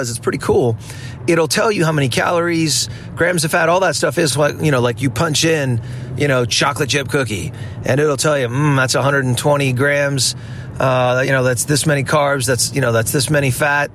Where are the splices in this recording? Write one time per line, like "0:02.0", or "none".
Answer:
none